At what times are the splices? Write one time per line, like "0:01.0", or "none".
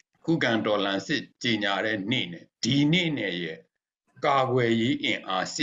0:02.5